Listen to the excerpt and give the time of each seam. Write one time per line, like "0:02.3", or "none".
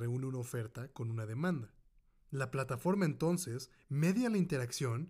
none